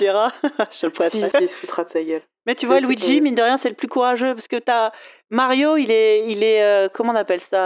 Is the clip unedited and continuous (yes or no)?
no